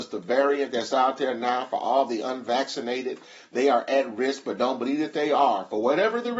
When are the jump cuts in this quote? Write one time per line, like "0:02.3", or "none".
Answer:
none